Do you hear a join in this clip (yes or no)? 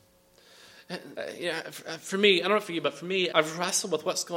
yes